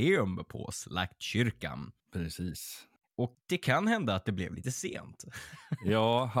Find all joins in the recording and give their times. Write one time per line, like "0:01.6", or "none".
0:03.3